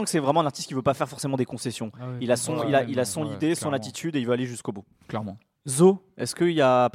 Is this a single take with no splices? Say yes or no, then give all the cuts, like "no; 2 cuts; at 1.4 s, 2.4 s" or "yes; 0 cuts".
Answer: yes; 0 cuts